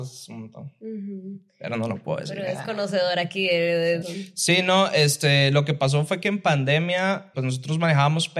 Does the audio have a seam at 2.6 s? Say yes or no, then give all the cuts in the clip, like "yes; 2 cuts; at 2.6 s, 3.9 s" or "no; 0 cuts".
no; 2 cuts; at 4.0 s, 7.3 s